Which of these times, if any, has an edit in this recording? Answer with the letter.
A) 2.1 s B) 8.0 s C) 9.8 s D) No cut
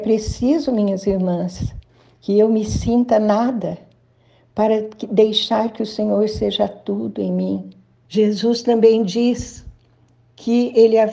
B